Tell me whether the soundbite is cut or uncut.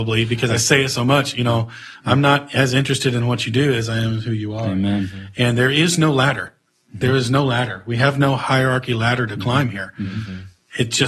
uncut